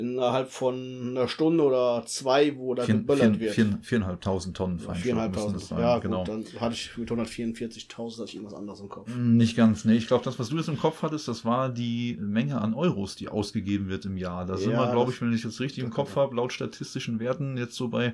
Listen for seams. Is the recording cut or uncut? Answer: uncut